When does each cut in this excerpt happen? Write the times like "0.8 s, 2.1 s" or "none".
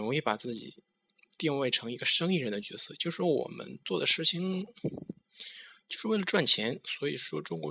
none